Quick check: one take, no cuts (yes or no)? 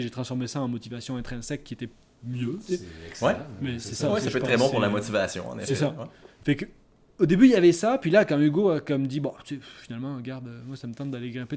yes